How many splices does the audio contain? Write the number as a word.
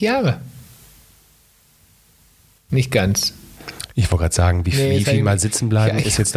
zero